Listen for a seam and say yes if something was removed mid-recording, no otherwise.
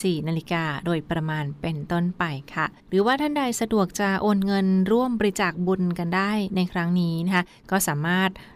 yes